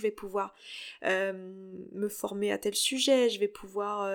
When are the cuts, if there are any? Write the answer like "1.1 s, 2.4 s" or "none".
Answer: none